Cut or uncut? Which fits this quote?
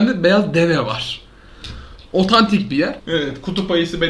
cut